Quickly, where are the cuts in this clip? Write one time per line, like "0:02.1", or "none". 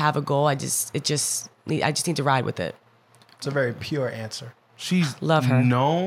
0:04.6